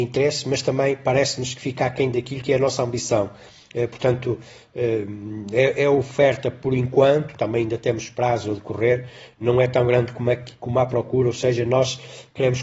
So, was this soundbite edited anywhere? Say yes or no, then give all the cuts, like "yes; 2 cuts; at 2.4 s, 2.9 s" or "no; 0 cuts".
no; 0 cuts